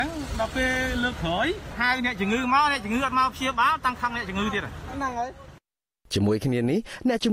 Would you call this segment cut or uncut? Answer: uncut